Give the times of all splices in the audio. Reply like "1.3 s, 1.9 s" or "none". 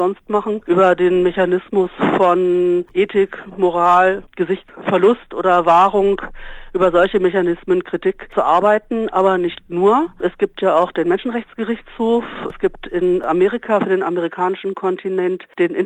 none